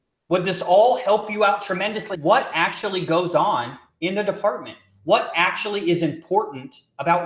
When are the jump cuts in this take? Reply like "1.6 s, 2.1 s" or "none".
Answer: 2.1 s